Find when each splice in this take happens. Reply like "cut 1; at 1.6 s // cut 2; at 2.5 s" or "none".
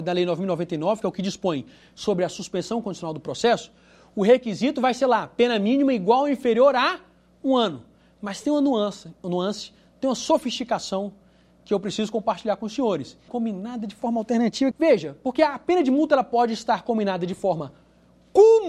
cut 1; at 13.3 s // cut 2; at 14.7 s

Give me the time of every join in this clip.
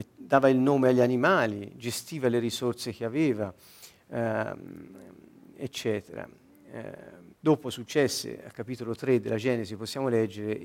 cut 1; at 7.3 s

